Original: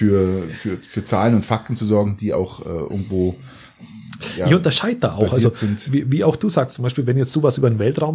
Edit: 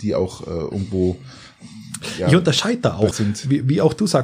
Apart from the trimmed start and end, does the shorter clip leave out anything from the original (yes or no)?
yes